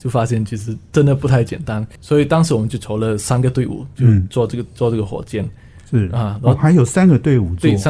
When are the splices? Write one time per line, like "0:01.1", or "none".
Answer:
0:02.0